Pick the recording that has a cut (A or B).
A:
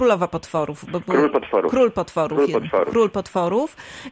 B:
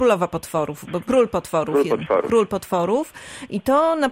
B